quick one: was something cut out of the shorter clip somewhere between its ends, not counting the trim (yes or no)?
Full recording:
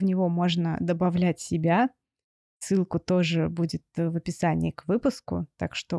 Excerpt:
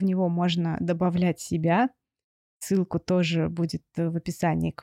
no